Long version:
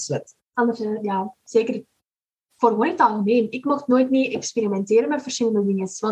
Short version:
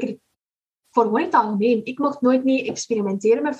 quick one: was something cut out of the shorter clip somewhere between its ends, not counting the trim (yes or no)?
no